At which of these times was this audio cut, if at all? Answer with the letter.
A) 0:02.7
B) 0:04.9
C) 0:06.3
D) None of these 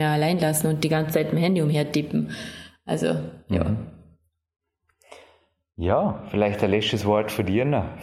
D